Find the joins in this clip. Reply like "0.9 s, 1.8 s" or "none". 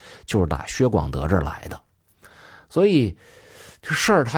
none